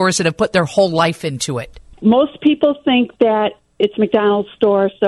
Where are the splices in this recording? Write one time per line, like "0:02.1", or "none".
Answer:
0:02.0